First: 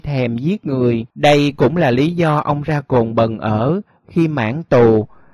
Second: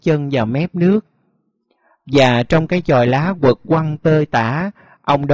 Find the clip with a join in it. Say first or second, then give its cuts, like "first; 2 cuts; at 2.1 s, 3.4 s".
first; 1 cut; at 1.1 s